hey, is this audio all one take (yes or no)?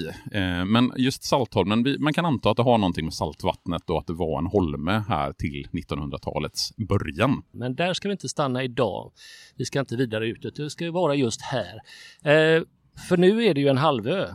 no